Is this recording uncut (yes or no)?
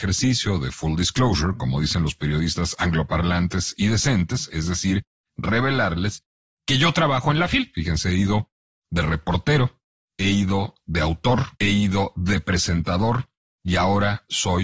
no